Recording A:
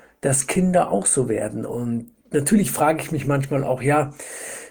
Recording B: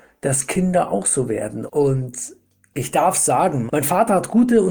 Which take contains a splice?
B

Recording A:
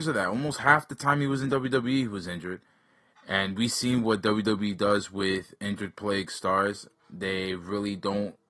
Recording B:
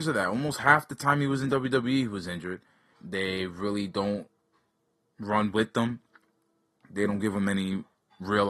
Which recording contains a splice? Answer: B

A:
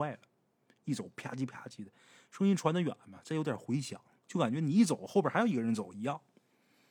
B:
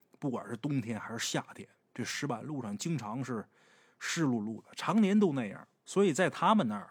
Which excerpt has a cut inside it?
B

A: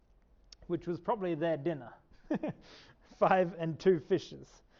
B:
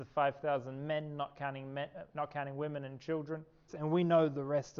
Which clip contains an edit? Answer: B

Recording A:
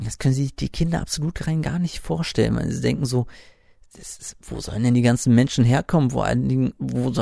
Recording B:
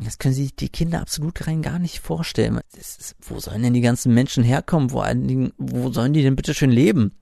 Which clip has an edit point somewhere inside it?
B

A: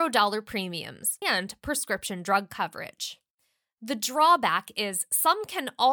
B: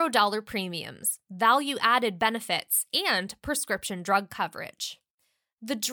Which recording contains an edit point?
A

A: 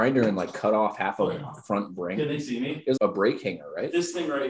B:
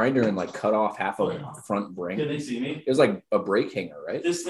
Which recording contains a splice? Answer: A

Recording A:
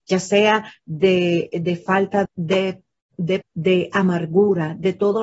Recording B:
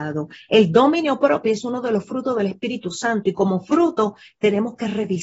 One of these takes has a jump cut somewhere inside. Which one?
A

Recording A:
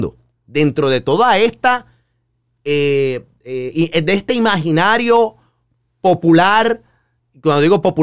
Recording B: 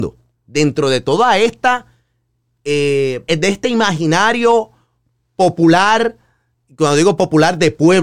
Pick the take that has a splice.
B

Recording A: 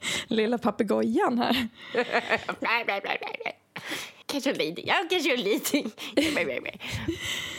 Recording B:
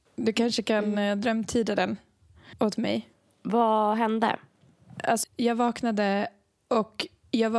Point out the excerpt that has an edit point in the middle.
B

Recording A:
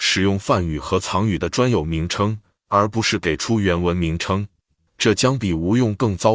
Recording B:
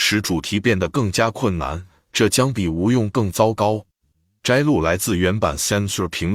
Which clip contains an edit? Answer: A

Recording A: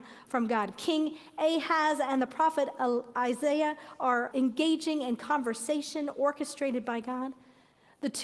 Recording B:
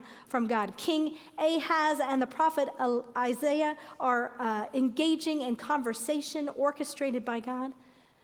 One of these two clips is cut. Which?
A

